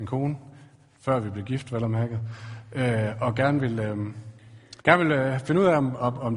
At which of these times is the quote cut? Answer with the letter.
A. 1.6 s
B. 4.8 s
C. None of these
B